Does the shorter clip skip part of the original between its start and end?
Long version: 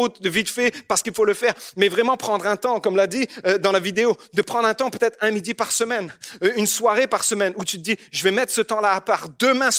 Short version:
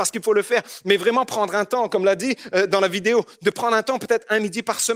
no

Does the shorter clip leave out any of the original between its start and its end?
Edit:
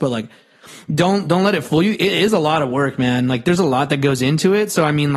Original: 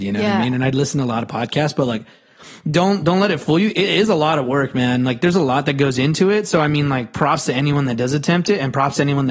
no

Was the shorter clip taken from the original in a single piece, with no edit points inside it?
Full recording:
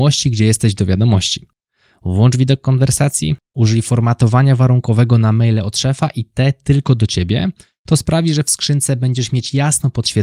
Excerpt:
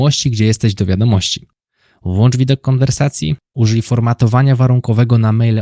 yes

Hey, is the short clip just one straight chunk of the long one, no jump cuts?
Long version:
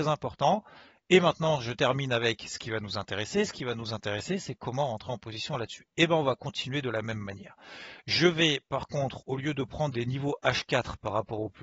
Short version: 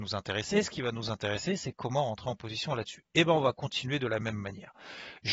yes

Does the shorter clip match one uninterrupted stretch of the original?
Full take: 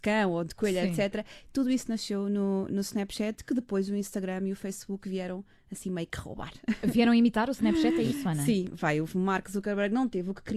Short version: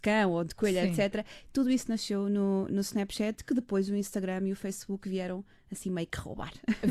yes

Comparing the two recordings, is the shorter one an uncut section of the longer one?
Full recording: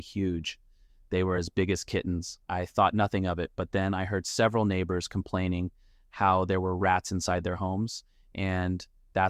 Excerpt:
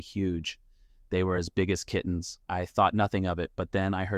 yes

